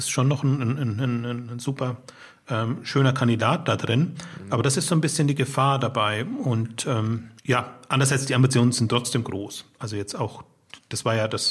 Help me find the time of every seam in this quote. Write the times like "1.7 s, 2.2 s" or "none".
7.4 s